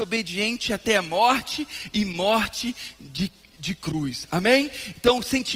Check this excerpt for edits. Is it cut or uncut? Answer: uncut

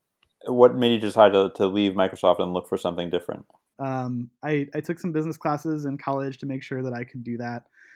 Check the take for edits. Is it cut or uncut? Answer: cut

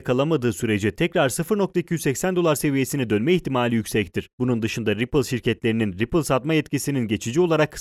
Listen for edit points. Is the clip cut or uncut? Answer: cut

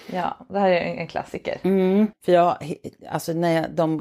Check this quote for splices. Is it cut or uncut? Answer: cut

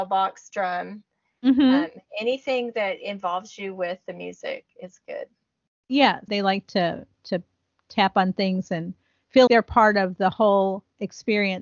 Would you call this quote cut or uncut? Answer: cut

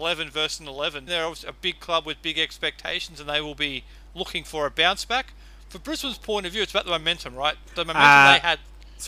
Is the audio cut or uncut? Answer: cut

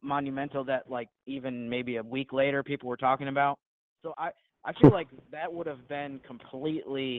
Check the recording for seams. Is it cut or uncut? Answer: cut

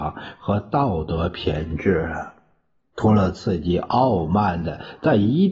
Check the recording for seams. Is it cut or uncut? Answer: uncut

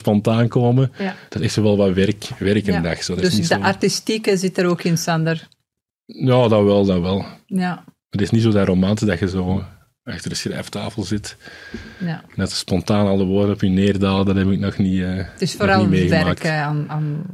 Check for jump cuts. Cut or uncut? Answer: uncut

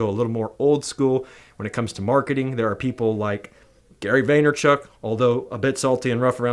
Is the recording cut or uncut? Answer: uncut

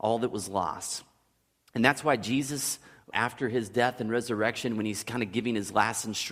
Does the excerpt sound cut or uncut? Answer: cut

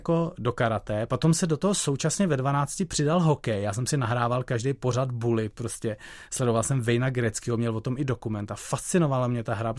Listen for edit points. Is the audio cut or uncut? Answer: uncut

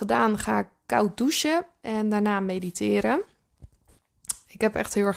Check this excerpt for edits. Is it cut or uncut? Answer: uncut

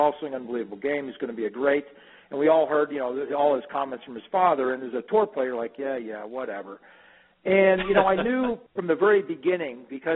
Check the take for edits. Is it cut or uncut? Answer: uncut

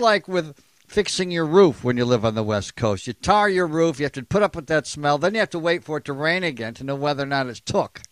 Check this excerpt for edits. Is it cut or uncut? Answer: uncut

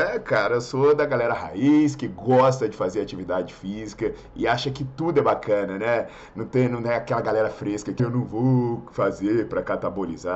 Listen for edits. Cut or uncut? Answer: cut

